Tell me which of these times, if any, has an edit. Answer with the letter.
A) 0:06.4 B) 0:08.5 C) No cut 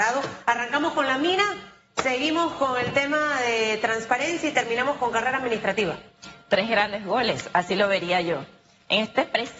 C